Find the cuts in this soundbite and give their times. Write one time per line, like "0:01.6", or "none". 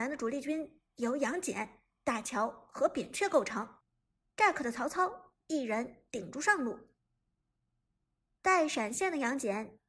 none